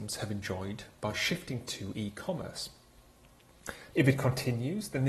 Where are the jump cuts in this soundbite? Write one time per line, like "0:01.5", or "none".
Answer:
0:03.9